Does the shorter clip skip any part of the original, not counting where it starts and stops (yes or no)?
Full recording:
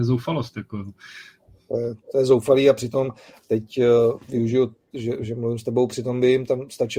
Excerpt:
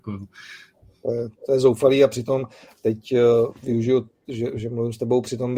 no